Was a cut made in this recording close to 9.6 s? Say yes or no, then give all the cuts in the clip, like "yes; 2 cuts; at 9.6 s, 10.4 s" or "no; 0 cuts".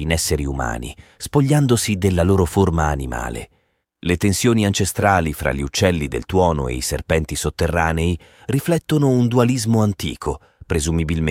no; 1 cut; at 3.8 s